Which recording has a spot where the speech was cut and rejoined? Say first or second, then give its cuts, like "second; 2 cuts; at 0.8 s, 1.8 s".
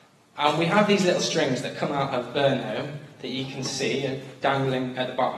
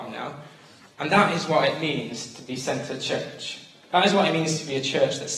second; 1 cut; at 0.9 s